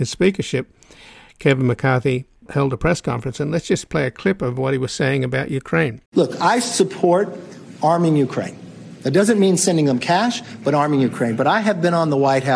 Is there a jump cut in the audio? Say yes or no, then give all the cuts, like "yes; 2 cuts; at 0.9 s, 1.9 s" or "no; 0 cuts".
yes; 1 cut; at 6.1 s